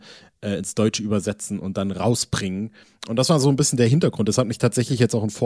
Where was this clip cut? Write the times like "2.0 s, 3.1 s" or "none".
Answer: none